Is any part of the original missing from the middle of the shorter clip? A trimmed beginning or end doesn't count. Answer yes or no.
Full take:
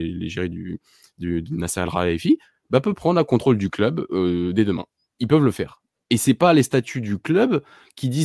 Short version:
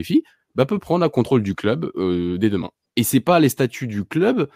yes